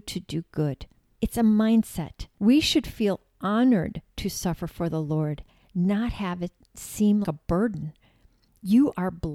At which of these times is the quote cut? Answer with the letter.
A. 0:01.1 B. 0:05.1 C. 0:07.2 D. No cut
C